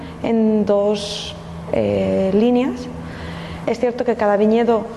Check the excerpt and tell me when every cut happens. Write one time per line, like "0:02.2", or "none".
0:03.6